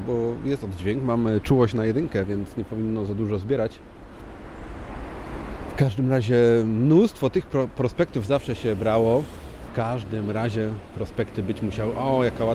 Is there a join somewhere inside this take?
yes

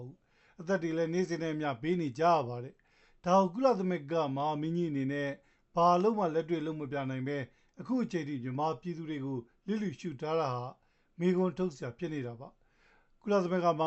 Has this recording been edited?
no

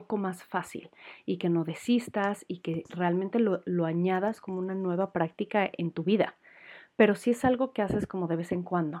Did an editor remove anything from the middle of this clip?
no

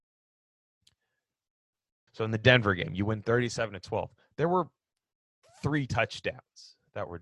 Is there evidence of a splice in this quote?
yes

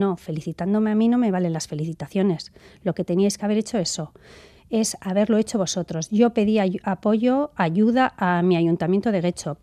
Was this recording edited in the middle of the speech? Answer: no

